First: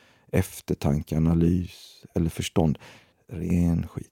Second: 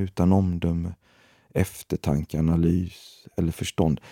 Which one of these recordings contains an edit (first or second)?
first